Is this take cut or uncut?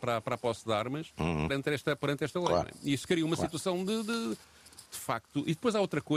cut